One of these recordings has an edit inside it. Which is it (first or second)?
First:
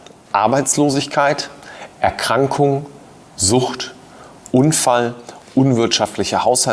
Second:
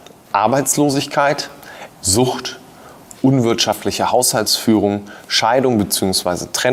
second